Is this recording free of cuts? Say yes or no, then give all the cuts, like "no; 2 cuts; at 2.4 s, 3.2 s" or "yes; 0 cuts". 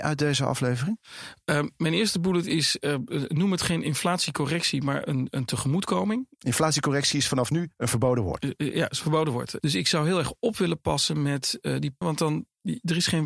no; 2 cuts; at 9.6 s, 12.0 s